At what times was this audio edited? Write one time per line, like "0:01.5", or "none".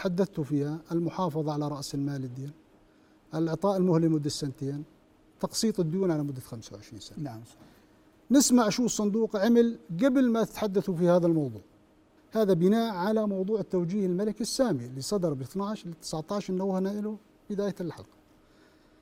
0:12.2